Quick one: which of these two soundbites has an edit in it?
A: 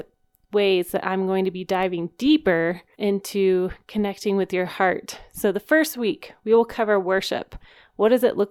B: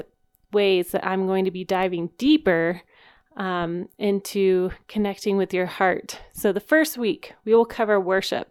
A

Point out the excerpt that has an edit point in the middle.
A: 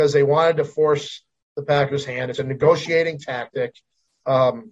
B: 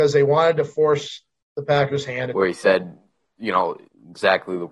B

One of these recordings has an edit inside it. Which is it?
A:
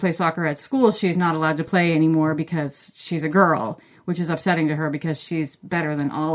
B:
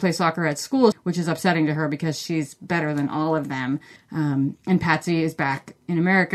B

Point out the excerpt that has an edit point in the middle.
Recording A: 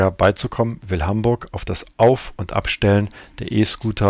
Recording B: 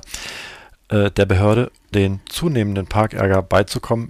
B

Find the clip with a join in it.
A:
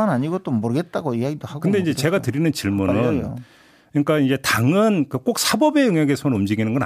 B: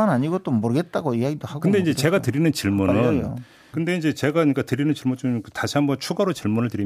B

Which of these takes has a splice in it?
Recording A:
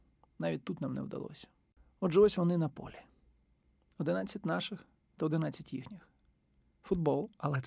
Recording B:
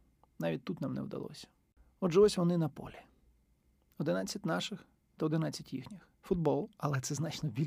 B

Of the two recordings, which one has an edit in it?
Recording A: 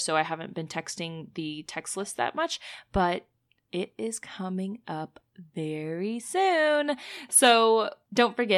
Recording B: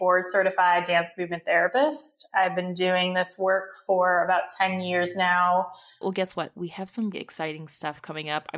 B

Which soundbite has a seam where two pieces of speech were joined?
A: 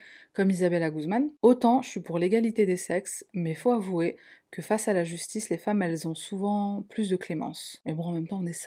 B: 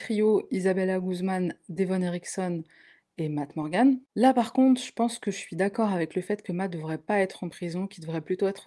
B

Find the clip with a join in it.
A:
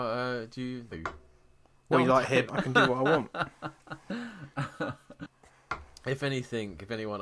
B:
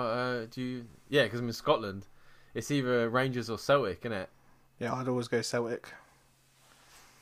A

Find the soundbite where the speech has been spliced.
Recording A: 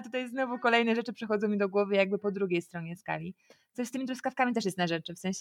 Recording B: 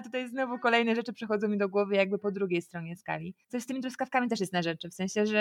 B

